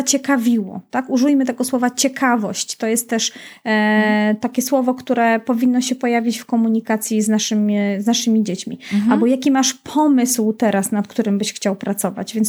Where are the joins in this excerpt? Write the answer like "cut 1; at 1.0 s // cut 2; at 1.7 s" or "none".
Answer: none